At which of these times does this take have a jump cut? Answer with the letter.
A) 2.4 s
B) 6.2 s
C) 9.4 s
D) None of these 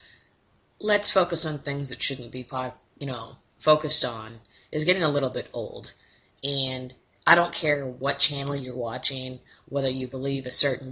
D